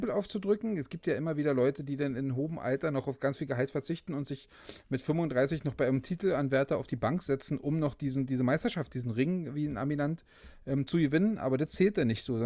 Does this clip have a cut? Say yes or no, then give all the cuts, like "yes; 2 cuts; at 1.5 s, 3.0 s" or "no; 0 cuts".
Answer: no; 0 cuts